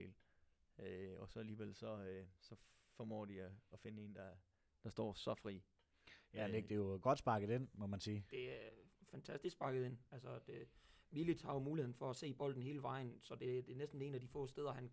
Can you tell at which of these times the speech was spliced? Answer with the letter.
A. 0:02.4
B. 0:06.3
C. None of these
A